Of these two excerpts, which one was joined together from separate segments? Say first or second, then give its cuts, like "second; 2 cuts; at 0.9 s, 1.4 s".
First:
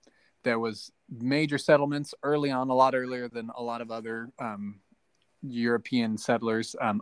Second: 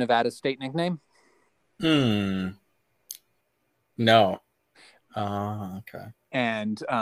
second; 1 cut; at 5.0 s